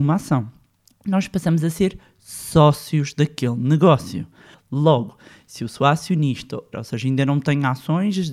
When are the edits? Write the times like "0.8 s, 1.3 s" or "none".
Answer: 4.5 s, 6.7 s